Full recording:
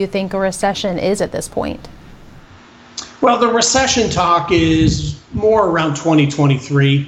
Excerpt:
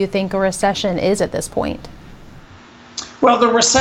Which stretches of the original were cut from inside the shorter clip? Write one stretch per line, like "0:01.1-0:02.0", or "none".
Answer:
none